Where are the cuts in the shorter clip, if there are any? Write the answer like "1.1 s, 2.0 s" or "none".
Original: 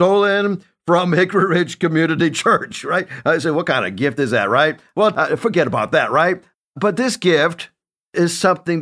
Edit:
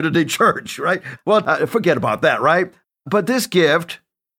1.2 s